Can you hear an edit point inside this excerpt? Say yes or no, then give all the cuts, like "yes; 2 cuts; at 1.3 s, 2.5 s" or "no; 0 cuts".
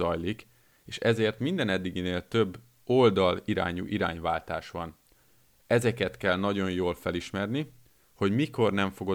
no; 0 cuts